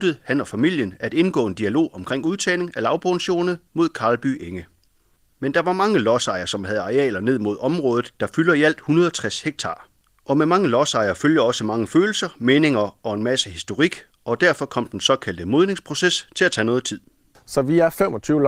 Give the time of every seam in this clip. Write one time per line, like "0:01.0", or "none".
none